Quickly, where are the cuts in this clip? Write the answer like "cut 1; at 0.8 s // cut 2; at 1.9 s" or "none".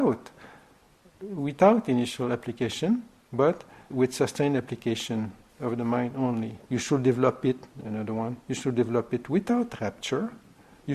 cut 1; at 1.1 s // cut 2; at 3.9 s // cut 3; at 6.7 s

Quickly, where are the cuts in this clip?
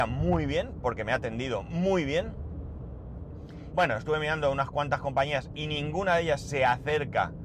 cut 1; at 3.7 s

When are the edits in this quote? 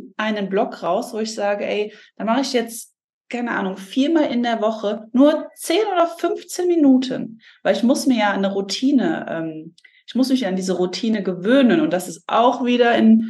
none

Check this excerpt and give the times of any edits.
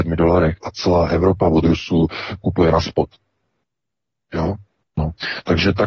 cut 1; at 4.8 s

